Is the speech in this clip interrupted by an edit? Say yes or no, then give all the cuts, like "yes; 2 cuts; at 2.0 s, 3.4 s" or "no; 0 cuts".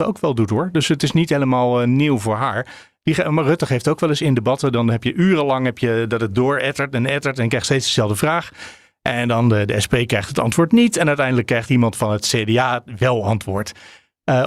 no; 0 cuts